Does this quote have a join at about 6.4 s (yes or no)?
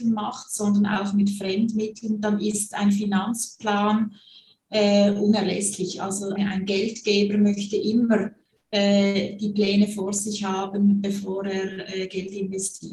yes